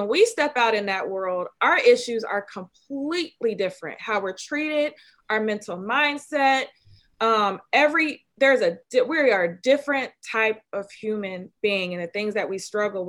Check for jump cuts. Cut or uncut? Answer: uncut